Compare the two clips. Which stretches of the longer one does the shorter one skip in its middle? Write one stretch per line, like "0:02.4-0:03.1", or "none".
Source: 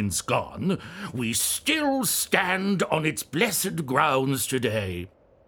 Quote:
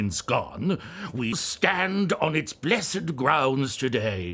0:01.3-0:02.0